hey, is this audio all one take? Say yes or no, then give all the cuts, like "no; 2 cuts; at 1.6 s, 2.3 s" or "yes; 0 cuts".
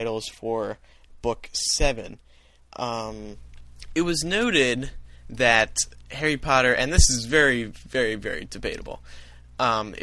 yes; 0 cuts